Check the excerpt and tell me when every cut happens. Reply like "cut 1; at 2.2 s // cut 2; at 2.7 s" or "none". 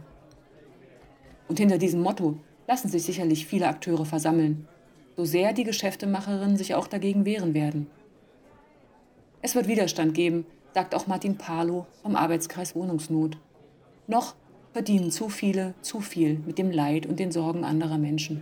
none